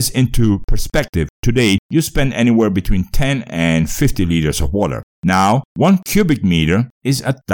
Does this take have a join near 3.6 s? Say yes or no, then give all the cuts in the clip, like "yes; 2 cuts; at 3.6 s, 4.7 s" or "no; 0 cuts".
no; 2 cuts; at 1.8 s, 5.2 s